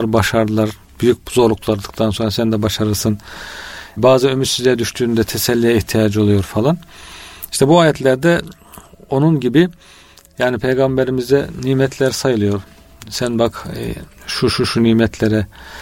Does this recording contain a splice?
no; 0 cuts

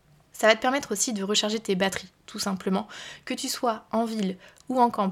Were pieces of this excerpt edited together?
no; 0 cuts

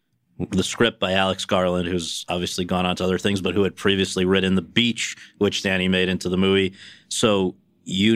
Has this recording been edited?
no; 0 cuts

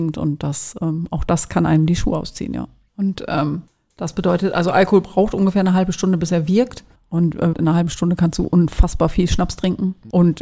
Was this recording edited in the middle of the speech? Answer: yes; 2 cuts; at 2.9 s, 7.5 s

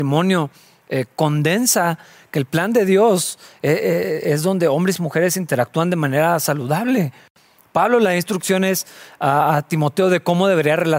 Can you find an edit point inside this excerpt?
no; 0 cuts

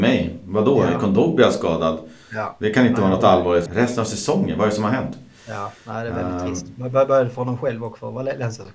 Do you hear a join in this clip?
yes; 1 cut; at 3.7 s

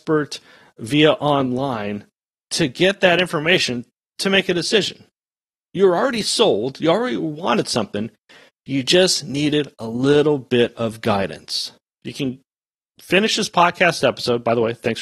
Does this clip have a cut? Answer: yes; 1 cut; at 12.0 s

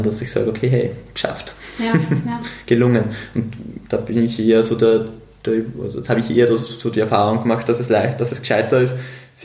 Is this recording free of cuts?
yes; 0 cuts

